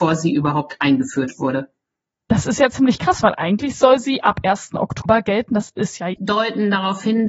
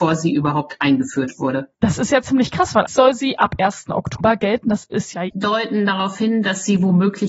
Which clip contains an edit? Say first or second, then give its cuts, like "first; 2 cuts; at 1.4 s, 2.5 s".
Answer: second; 2 cuts; at 1.7 s, 2.9 s